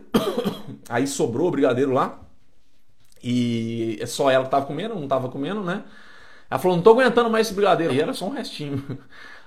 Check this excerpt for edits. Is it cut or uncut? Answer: cut